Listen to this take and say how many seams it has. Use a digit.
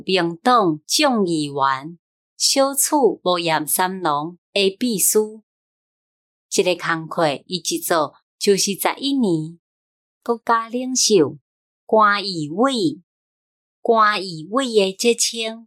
1